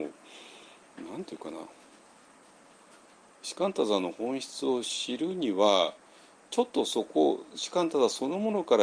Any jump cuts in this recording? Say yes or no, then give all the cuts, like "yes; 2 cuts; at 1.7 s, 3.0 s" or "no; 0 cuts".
no; 0 cuts